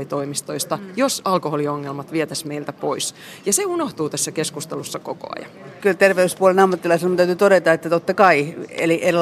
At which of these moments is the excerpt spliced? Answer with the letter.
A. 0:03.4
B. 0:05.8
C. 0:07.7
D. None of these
B